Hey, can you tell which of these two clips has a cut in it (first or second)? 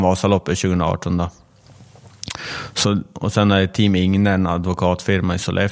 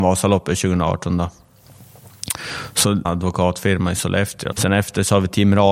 second